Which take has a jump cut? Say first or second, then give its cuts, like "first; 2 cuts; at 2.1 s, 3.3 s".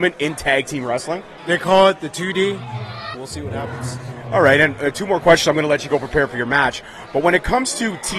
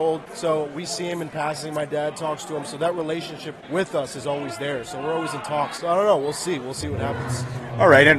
first; 2 cuts; at 1.4 s, 3.1 s